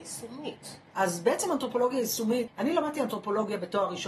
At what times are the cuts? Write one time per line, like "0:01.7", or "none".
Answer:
0:00.9
0:02.5